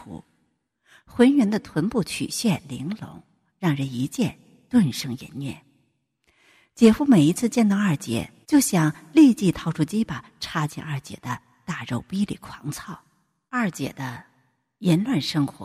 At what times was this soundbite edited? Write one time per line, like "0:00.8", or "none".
0:08.4
0:13.5